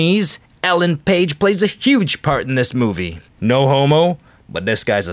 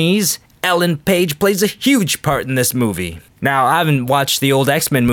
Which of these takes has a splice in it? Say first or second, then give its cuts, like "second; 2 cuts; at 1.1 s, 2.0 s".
first; 1 cut; at 3.3 s